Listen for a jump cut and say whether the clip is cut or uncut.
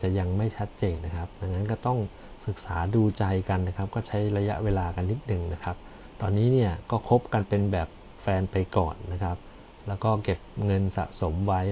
cut